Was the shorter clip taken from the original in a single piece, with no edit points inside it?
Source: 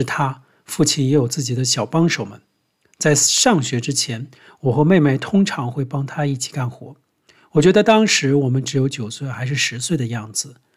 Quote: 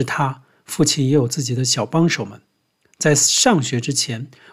yes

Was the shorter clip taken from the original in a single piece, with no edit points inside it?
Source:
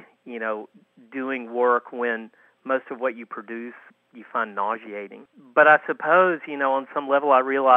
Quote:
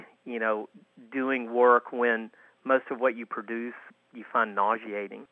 yes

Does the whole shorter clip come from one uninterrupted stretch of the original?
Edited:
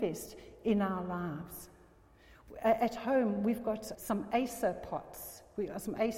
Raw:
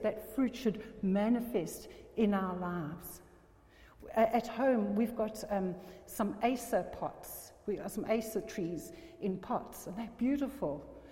no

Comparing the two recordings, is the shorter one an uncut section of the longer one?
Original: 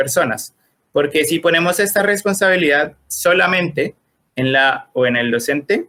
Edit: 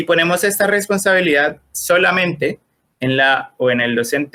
yes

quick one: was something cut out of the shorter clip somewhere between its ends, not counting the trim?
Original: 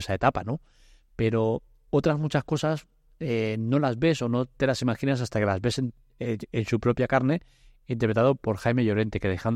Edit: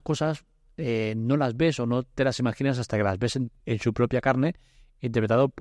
yes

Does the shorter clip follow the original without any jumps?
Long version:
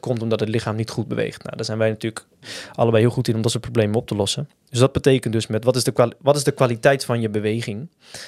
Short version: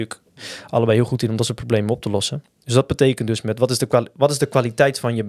yes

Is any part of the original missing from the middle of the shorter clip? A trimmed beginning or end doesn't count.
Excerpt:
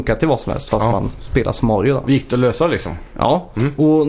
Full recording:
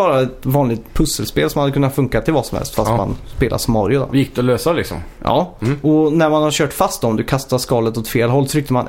no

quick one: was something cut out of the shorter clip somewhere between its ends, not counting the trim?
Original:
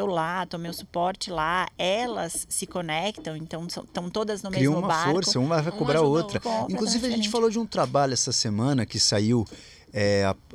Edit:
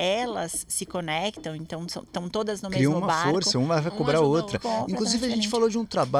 no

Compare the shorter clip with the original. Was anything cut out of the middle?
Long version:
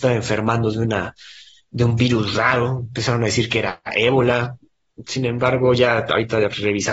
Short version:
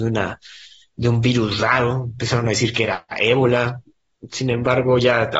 no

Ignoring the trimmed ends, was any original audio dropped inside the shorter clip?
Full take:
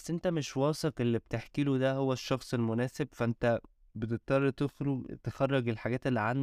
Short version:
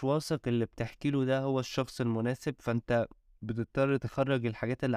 yes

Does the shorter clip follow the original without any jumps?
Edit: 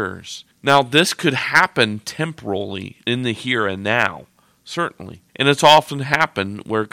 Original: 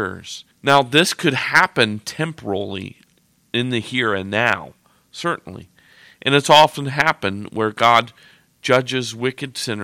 no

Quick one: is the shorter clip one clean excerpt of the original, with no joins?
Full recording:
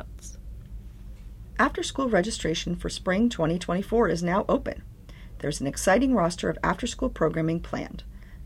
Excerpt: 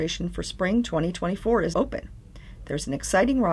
no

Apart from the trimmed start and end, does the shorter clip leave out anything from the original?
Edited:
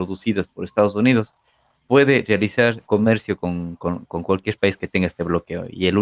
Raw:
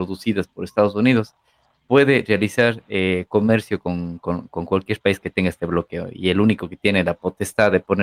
yes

